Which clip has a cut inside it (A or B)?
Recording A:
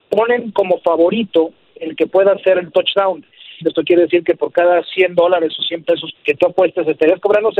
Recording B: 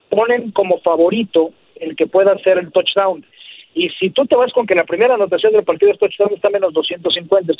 A